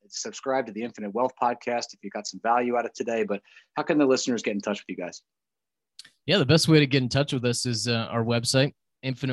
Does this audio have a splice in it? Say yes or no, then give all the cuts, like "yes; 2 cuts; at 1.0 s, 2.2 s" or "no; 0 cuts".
no; 0 cuts